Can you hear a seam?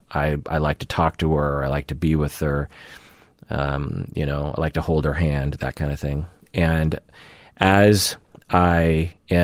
no; 0 cuts

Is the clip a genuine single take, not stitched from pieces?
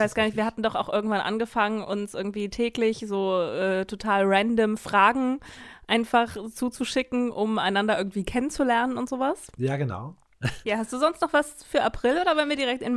no; 1 cut; at 10.6 s

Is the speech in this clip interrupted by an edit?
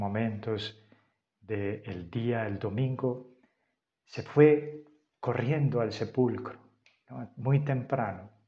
no; 0 cuts

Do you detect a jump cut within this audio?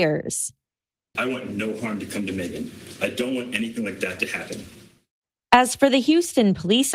yes; 1 cut; at 1.1 s

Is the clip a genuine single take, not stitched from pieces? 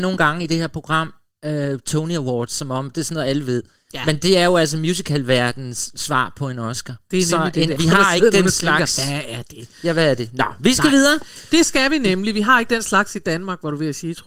no; 1 cut; at 7.8 s

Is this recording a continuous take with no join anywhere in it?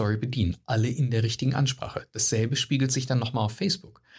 yes; 0 cuts

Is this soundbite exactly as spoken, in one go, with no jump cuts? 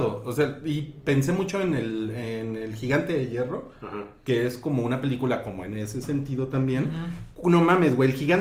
yes; 0 cuts

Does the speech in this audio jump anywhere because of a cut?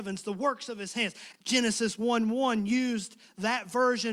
yes; 1 cut; at 1.3 s

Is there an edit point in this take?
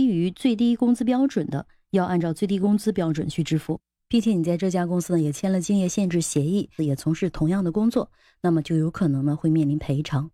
yes; 2 cuts; at 4.0 s, 6.8 s

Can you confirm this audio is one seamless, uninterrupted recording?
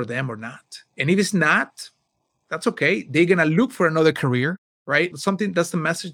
no; 1 cut; at 5.1 s

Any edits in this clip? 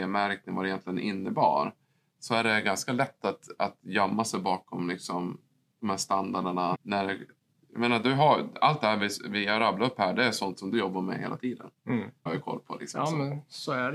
yes; 2 cuts; at 6.7 s, 12.3 s

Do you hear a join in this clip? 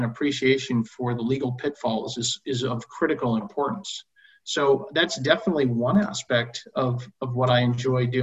no; 0 cuts

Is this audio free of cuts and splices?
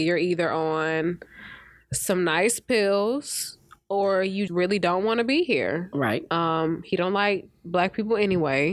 no; 1 cut; at 4.5 s

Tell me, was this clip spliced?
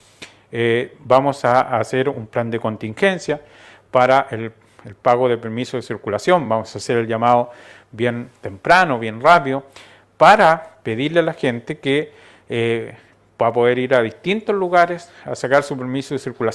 no; 0 cuts

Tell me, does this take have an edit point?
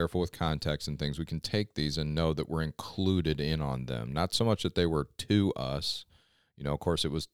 no; 0 cuts

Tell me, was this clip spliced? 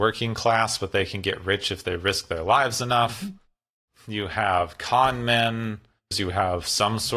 yes; 1 cut; at 6.1 s

